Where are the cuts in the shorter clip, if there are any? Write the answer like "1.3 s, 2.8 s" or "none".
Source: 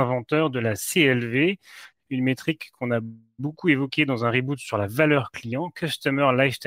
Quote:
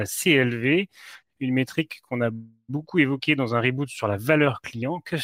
none